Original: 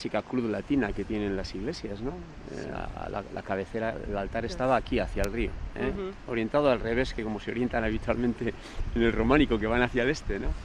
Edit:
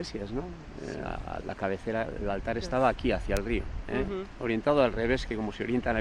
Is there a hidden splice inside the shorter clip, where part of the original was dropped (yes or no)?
yes